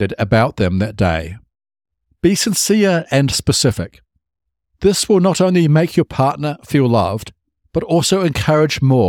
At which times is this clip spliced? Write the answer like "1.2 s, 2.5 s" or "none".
2.1 s